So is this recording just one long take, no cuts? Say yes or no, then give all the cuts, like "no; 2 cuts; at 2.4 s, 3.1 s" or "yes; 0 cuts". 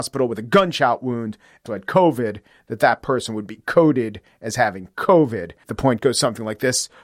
no; 2 cuts; at 1.7 s, 5.6 s